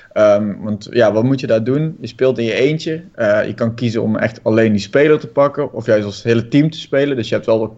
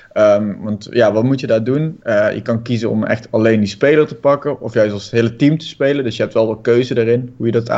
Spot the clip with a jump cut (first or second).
second